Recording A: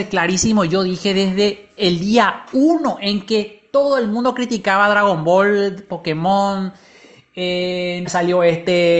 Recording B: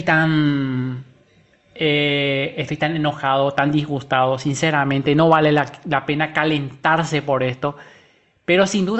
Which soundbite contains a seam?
A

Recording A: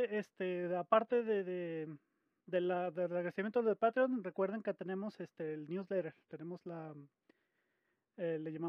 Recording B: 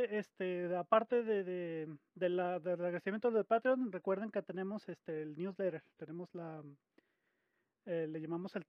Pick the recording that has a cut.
B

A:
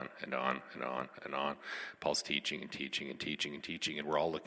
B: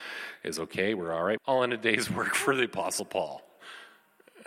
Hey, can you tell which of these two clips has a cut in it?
B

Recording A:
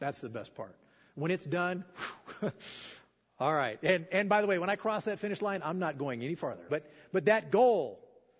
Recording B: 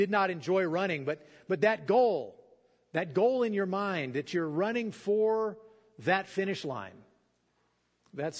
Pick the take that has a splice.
A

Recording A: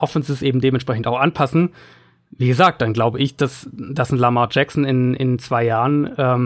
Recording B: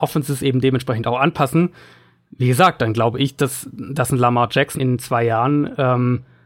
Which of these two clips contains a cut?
B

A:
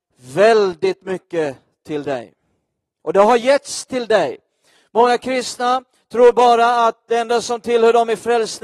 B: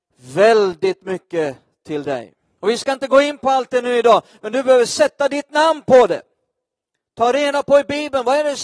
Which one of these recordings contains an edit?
B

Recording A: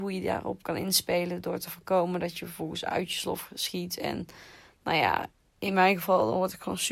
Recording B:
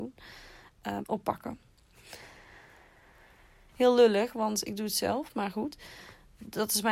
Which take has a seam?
B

